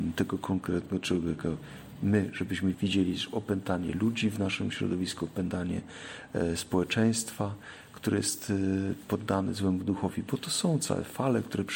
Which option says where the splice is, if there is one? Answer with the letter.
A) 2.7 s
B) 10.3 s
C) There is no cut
A